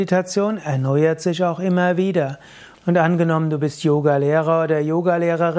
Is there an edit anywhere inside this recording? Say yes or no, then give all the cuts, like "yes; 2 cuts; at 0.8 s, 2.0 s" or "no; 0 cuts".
yes; 1 cut; at 2.7 s